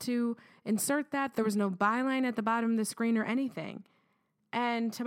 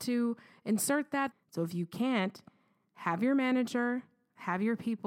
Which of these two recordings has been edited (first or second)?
second